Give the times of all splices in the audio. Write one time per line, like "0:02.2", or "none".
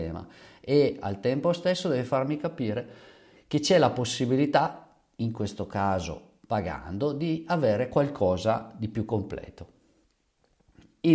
none